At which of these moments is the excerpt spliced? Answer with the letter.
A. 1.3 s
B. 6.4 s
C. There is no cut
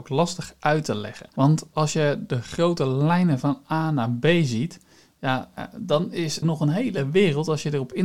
B